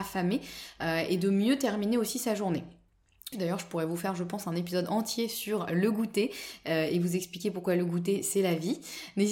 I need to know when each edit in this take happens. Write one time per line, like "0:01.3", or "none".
0:03.3